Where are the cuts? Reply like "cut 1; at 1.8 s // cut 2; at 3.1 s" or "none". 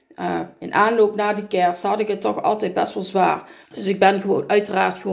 cut 1; at 3.7 s